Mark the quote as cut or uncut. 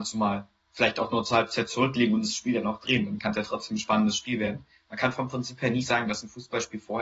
uncut